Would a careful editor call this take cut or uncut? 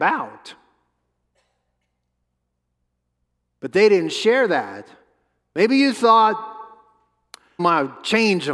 cut